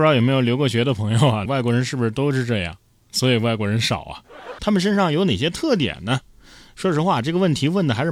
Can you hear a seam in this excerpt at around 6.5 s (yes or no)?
no